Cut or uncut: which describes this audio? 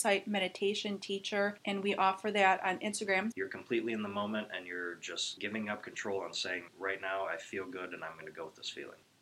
cut